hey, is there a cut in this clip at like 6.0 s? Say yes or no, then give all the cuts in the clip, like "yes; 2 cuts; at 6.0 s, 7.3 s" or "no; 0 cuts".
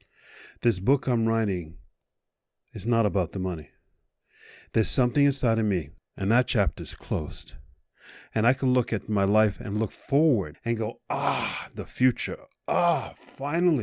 yes; 2 cuts; at 6.0 s, 10.5 s